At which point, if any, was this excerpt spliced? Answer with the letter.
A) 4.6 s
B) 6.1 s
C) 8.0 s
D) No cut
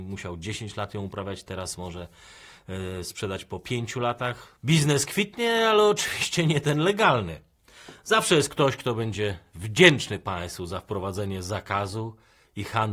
A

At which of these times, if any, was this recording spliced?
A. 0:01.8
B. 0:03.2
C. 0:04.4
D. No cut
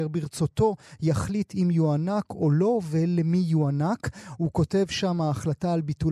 C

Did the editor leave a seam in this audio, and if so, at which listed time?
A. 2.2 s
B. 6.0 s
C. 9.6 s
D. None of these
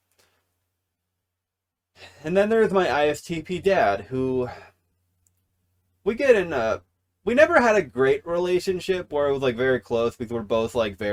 D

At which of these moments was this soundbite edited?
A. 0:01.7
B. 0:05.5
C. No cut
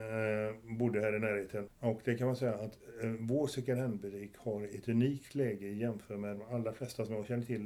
A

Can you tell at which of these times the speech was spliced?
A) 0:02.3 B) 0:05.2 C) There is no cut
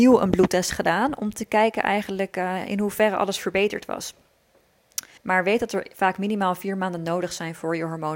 B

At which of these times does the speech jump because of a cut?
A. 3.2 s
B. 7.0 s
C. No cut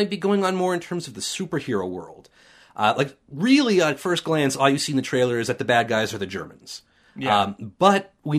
C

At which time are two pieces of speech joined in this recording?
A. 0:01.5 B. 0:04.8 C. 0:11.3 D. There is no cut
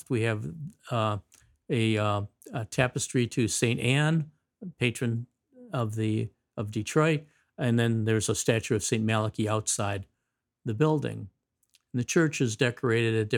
D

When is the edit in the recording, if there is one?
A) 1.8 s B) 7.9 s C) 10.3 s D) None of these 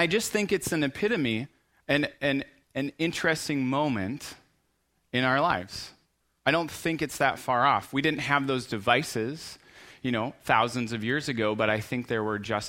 D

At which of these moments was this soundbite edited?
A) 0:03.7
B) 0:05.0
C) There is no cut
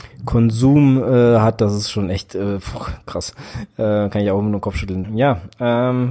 B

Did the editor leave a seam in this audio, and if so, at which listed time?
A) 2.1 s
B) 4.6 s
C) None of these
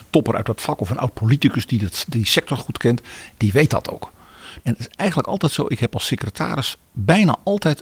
B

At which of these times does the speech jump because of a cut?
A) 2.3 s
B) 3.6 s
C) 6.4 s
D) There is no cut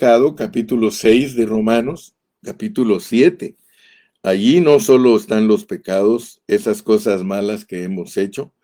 A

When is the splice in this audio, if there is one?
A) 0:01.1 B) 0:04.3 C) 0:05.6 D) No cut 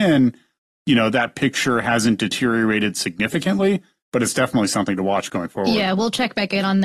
D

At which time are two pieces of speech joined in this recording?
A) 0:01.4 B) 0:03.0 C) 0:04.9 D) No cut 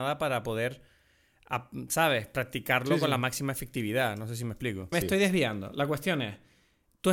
C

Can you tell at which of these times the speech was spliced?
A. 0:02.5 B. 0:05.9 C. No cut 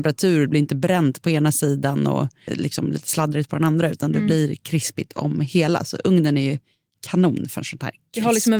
A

